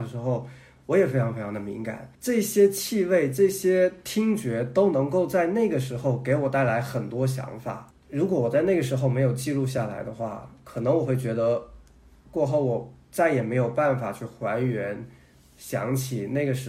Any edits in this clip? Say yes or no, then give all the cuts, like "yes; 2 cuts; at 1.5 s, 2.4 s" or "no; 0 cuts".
yes; 1 cut; at 2.1 s